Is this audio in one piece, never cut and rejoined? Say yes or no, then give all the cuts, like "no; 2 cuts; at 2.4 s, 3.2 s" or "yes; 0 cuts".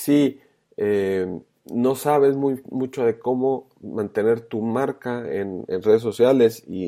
yes; 0 cuts